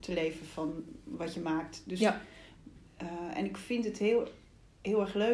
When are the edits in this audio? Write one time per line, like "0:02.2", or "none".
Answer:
none